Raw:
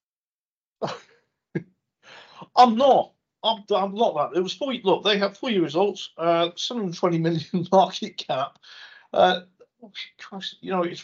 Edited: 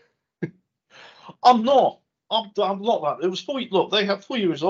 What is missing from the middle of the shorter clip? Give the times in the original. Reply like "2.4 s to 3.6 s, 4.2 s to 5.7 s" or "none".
none